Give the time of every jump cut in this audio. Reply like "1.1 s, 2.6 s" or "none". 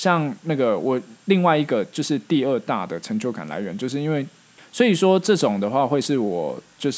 4.6 s